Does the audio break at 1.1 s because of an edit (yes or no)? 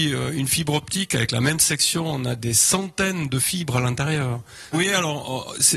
no